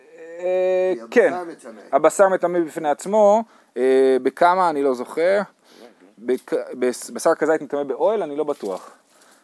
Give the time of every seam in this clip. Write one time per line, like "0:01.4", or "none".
none